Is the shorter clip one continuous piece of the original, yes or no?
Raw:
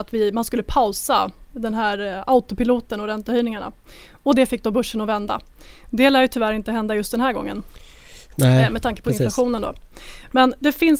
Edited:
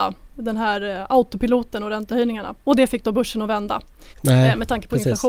no